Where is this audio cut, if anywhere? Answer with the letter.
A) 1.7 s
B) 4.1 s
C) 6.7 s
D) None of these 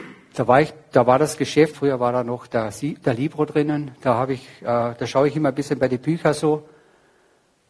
A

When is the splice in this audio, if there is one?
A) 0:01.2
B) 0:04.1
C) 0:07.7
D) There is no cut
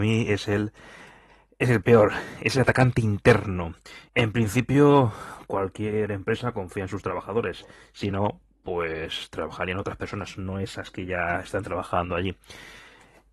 B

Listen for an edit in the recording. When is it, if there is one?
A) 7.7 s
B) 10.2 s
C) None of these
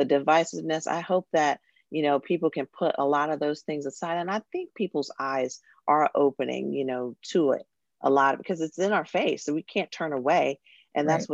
C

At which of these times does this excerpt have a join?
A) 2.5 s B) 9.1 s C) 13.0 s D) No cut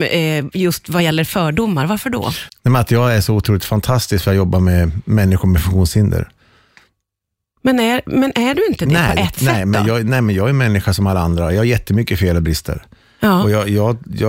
A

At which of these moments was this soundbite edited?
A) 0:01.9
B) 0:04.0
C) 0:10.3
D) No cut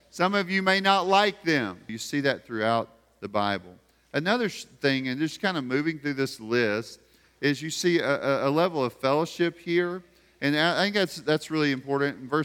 A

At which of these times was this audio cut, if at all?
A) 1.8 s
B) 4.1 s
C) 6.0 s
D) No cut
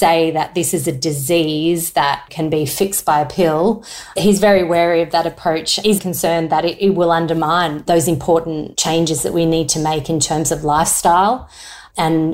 C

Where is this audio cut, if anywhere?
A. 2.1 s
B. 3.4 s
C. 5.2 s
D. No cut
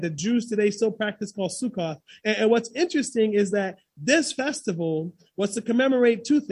D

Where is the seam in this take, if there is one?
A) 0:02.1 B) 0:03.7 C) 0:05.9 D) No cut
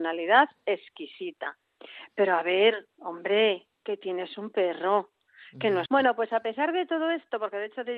C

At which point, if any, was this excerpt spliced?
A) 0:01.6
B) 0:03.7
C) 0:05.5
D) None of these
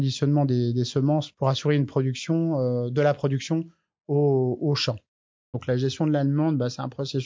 C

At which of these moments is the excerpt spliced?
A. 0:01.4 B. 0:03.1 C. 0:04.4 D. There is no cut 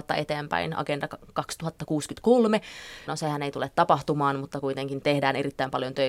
B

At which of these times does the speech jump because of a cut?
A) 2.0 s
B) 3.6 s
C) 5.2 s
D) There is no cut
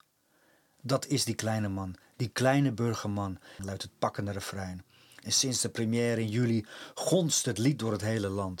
B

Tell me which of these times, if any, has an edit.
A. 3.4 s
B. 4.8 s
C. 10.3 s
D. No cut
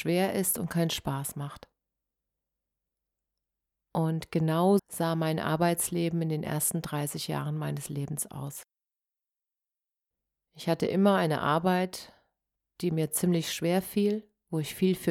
B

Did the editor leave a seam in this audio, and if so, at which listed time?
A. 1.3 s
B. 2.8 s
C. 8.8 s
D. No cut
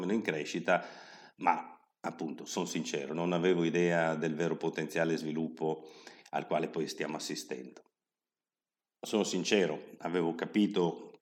C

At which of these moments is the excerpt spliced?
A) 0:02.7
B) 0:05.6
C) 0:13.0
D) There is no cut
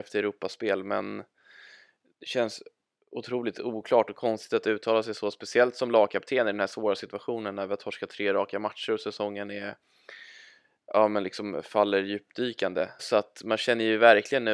C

